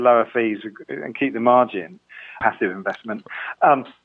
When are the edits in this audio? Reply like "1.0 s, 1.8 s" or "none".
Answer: 2.4 s